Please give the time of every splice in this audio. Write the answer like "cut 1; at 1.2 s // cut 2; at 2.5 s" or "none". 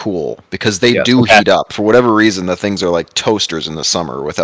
none

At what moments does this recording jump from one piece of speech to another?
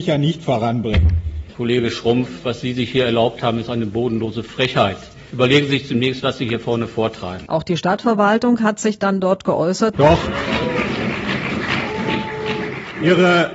cut 1; at 7.5 s // cut 2; at 9.9 s

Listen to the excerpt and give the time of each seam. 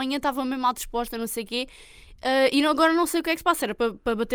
none

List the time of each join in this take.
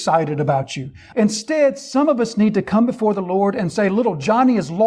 cut 1; at 1.1 s

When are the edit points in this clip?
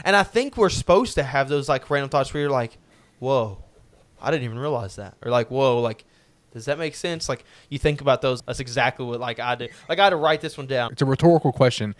cut 1; at 8.4 s // cut 2; at 10.9 s

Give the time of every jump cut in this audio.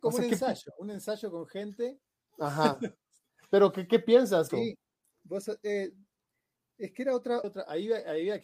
cut 1; at 4.5 s // cut 2; at 7.4 s

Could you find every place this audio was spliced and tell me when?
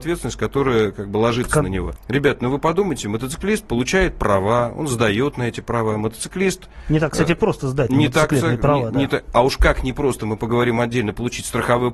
cut 1; at 2.0 s

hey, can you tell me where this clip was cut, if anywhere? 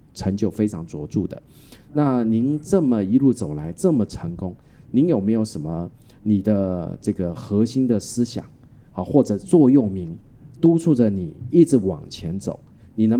none

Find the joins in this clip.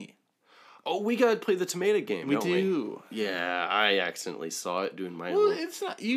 none

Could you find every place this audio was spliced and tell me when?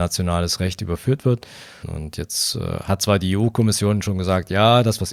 cut 1; at 1.8 s

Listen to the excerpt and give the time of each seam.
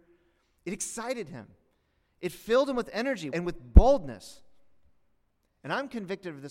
cut 1; at 3.3 s

